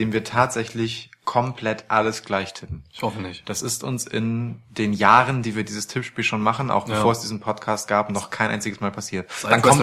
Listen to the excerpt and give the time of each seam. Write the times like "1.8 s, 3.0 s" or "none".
none